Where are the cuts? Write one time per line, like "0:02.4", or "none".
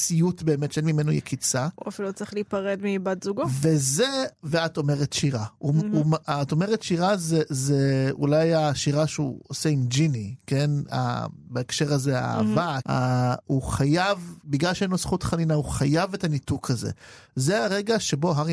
0:12.8